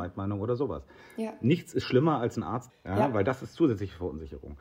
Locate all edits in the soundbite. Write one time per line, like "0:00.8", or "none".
0:02.7